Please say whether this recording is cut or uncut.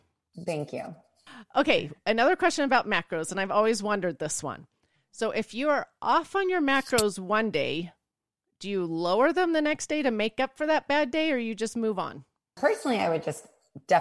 uncut